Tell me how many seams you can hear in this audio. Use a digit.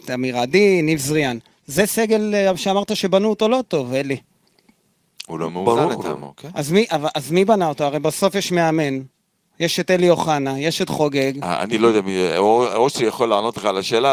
0